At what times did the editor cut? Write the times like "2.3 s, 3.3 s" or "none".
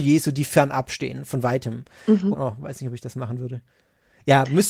2.3 s

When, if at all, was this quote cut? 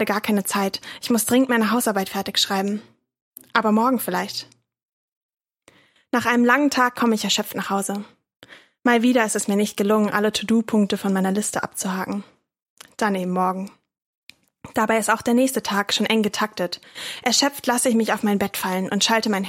none

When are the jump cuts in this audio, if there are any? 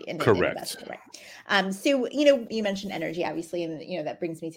2.5 s

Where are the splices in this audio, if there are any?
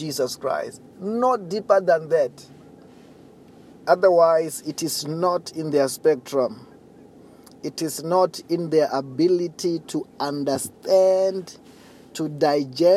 none

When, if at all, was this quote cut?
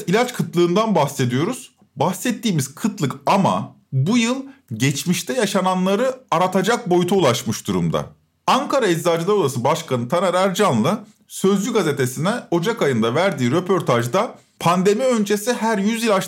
3.8 s

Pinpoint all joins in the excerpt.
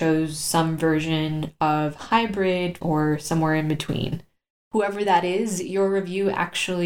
2.8 s, 4.5 s

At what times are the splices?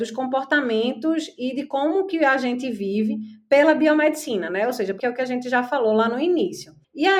5.0 s

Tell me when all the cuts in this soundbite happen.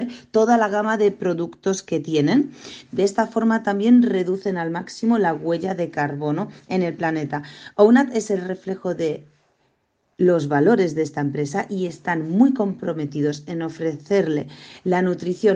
2.8 s

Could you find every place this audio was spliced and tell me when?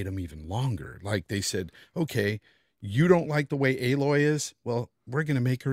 none

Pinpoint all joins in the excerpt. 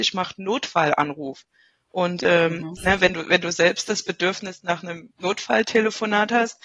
1.7 s, 2.8 s

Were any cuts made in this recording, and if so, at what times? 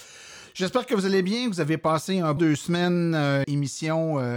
2.4 s, 3.4 s

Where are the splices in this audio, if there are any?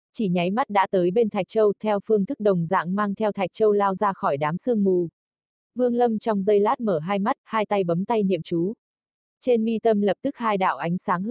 none

